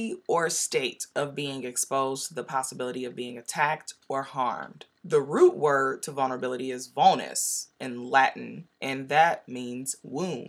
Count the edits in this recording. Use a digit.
2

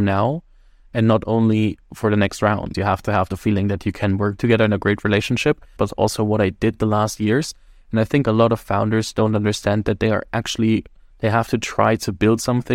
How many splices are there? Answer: 3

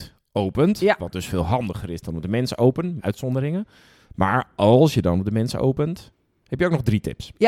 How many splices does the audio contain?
1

